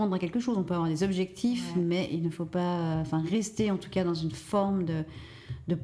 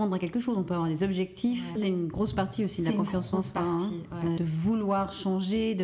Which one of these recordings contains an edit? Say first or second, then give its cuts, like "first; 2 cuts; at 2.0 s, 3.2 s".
second; 2 cuts; at 1.8 s, 4.4 s